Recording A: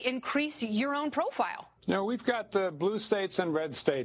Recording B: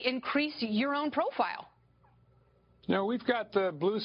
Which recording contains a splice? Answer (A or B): A